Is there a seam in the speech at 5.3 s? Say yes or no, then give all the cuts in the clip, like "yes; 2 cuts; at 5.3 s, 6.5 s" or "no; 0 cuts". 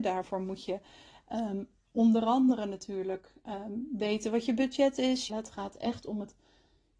yes; 1 cut; at 5.3 s